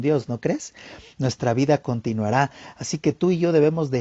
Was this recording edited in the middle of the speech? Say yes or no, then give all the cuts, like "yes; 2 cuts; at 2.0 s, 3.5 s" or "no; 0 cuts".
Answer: no; 0 cuts